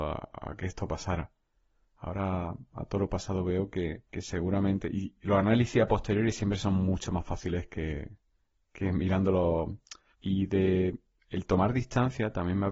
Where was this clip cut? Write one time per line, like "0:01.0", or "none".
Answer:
0:04.1
0:10.1